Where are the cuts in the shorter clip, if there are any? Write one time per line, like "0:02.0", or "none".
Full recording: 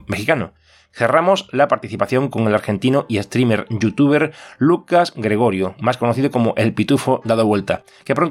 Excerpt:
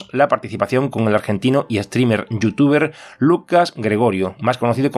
none